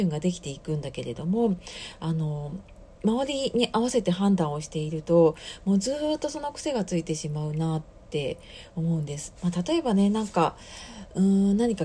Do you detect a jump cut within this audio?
yes; 2 cuts; at 2.9 s, 9.4 s

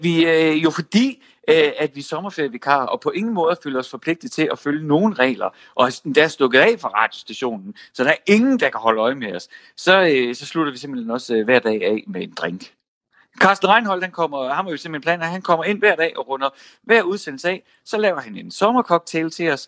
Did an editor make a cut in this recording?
no; 0 cuts

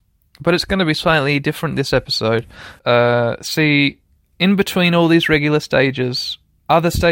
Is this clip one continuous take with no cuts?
no; 1 cut; at 2.8 s

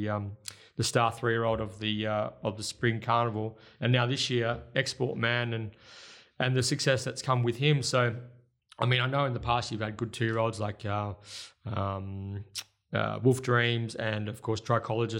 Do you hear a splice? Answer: no; 0 cuts

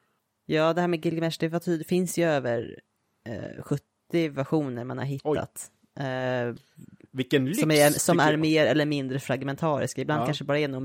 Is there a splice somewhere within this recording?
no; 0 cuts

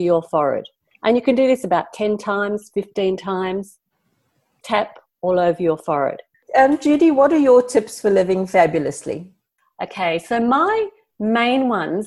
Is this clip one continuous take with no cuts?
no; 2 cuts; at 4.6 s, 6.3 s

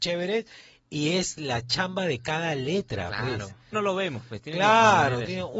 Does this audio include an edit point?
yes; 1 cut; at 3.7 s

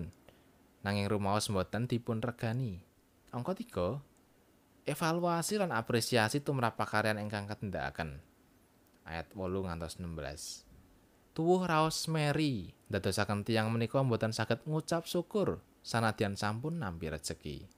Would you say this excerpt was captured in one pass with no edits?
no; 3 cuts; at 3.2 s, 11.2 s, 12.8 s

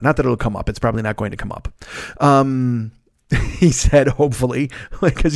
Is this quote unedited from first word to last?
yes; 0 cuts

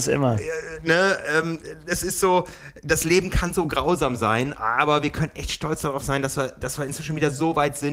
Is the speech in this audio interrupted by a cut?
no; 0 cuts

